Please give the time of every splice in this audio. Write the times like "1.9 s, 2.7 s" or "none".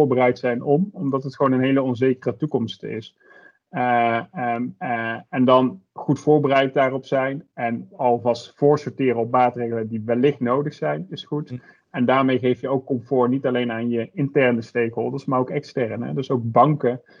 none